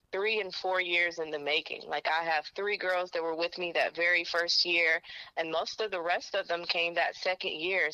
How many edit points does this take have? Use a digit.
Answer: 1